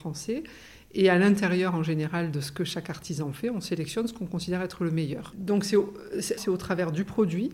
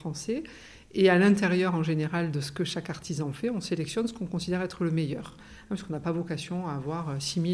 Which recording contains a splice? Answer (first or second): first